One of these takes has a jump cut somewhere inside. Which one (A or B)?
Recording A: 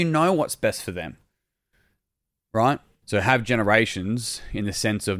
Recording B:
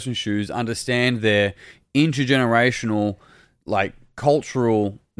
A